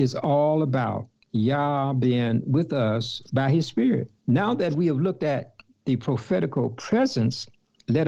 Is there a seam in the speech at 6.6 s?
no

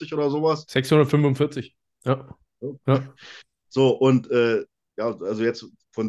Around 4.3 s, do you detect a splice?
no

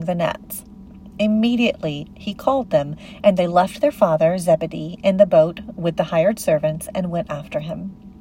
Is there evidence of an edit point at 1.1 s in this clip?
no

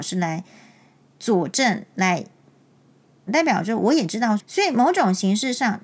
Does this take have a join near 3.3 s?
yes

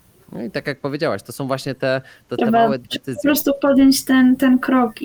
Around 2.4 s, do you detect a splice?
yes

